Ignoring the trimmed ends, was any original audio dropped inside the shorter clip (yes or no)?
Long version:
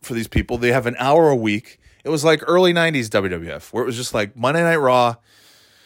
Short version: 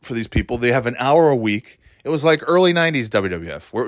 no